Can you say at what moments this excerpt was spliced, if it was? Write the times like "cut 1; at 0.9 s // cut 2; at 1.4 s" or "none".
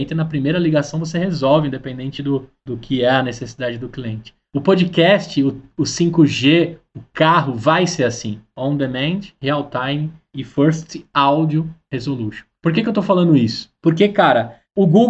none